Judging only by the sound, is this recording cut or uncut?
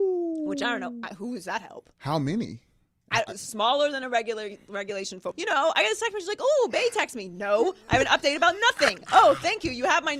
cut